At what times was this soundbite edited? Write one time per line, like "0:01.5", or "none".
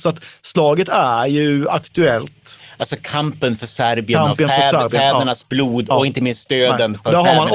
none